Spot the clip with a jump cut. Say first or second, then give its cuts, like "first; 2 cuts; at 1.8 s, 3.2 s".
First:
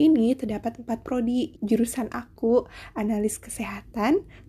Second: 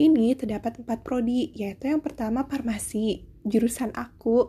first; 1 cut; at 1.5 s